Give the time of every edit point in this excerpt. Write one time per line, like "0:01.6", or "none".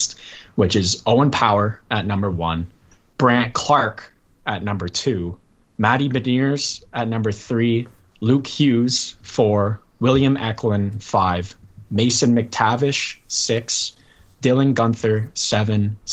none

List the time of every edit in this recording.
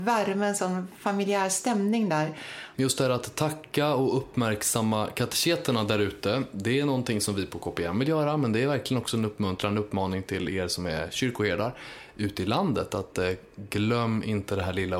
0:02.7

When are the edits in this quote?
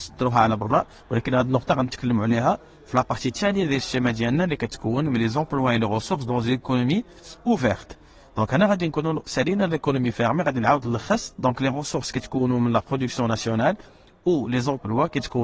none

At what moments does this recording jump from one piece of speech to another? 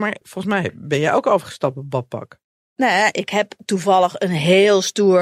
none

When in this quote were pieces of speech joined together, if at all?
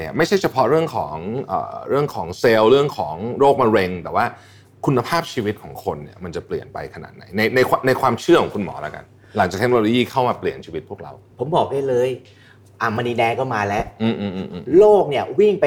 none

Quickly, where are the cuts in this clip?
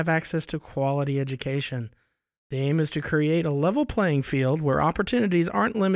none

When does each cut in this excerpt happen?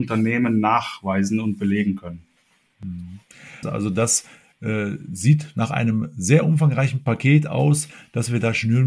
0:03.6

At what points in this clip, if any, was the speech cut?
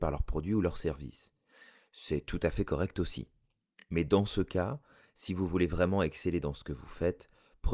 none

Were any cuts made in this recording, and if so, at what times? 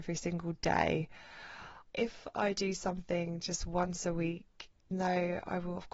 0:01.9
0:04.9

